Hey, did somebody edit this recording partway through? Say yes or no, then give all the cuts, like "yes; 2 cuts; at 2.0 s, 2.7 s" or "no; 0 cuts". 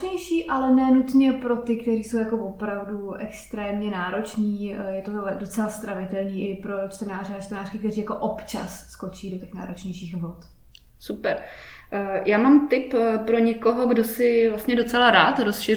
yes; 1 cut; at 9.4 s